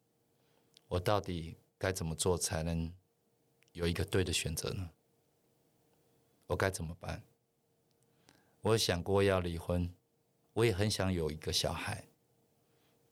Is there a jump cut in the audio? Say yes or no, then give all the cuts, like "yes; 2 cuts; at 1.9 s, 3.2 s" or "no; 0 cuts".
yes; 2 cuts; at 6.4 s, 10.4 s